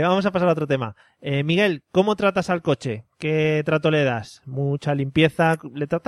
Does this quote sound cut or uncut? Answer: uncut